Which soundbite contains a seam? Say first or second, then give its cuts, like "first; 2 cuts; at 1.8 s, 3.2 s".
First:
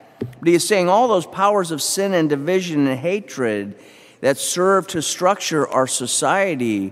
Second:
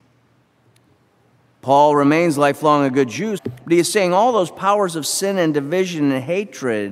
second; 1 cut; at 3.4 s